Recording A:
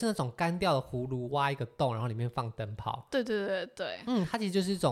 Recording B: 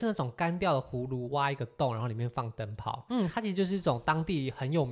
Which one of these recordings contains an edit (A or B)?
B